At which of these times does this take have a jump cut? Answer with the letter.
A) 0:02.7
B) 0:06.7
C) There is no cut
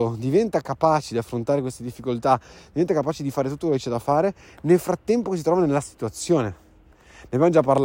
C